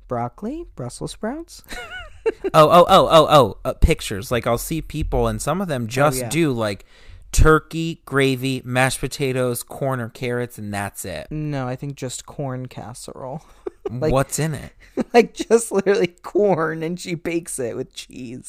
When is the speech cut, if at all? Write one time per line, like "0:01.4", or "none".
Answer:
0:11.3